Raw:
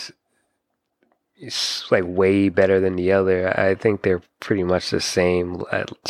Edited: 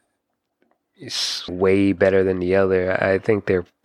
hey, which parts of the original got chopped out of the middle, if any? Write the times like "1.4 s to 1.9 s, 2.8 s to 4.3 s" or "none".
1.9 s to 2.0 s